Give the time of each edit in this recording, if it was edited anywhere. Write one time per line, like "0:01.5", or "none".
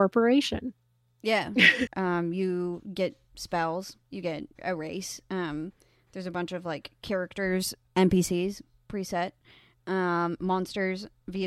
0:01.9